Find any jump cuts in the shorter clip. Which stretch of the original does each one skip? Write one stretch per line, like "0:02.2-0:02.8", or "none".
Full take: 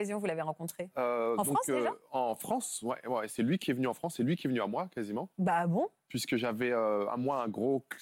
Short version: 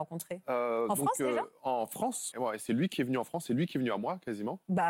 0:02.8-0:03.0